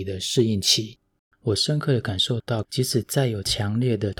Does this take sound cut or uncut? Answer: cut